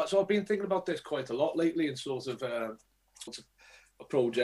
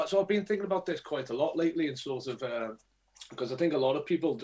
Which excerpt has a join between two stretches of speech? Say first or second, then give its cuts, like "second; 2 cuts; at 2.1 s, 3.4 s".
first; 1 cut; at 3.3 s